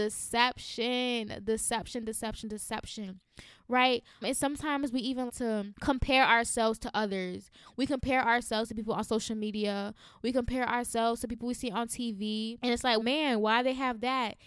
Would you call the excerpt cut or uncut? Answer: cut